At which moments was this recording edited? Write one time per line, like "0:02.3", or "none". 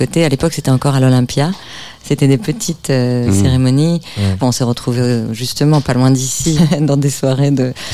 0:04.4
0:06.6